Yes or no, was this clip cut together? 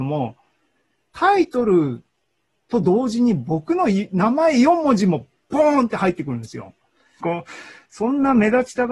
yes